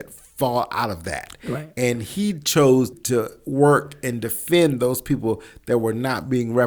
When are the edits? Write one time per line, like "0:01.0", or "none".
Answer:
0:02.9